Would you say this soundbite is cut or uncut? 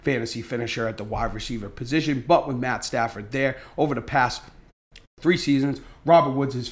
uncut